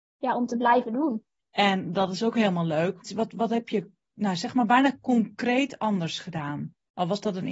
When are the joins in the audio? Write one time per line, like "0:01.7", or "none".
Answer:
0:01.4
0:03.0